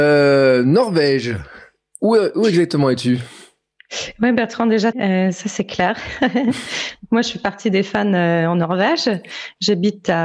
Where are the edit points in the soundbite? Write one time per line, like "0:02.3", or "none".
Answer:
0:04.9